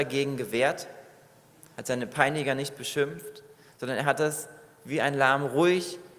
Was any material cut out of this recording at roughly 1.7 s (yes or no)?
yes